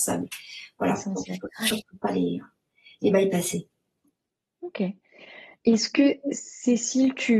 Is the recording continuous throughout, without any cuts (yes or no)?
yes